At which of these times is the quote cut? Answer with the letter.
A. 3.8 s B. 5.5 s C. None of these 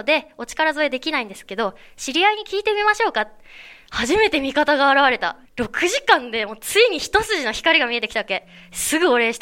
B